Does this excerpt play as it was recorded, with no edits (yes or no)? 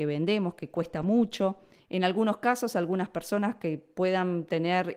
no